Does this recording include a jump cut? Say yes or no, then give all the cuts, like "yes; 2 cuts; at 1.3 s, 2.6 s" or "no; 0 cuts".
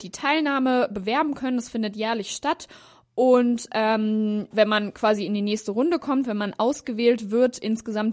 yes; 1 cut; at 4.5 s